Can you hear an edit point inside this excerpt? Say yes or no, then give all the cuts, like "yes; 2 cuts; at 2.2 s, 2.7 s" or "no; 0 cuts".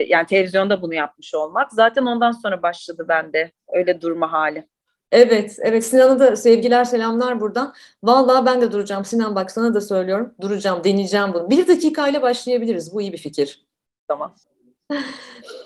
no; 0 cuts